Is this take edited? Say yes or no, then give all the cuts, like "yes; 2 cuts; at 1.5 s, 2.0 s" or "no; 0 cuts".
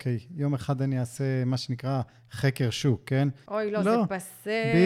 yes; 1 cut; at 3.5 s